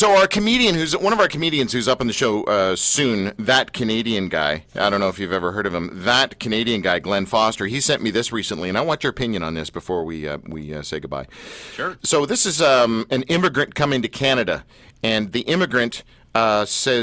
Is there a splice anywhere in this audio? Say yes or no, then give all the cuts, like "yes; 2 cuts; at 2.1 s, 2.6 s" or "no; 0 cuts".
no; 0 cuts